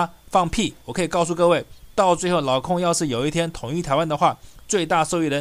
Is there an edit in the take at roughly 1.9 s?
no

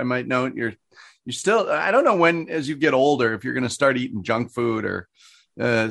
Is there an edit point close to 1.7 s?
no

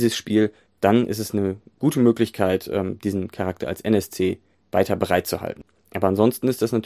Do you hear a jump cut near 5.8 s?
yes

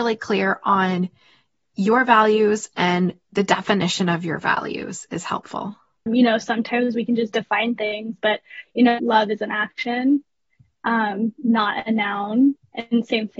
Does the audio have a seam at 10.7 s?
no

